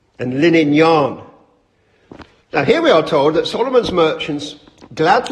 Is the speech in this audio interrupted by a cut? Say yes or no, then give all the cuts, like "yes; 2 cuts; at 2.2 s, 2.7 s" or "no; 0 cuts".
yes; 1 cut; at 2.4 s